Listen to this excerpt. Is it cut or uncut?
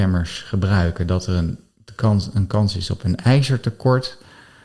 uncut